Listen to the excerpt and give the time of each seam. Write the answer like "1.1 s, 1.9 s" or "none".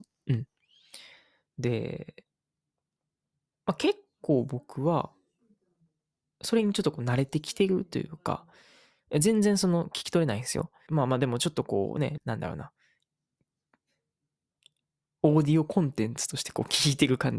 10.9 s, 12.2 s